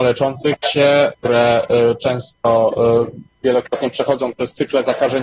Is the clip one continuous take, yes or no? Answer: no